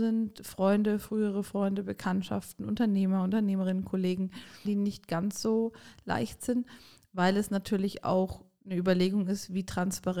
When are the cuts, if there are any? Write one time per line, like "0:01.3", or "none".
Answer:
0:04.7